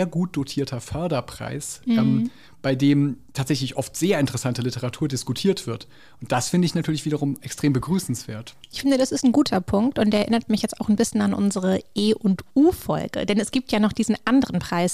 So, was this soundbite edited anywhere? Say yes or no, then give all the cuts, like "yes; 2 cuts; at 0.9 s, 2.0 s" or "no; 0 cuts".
no; 0 cuts